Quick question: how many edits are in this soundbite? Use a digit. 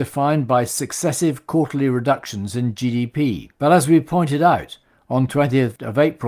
1